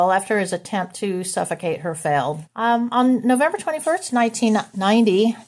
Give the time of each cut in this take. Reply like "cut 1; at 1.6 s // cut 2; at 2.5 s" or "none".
cut 1; at 2.5 s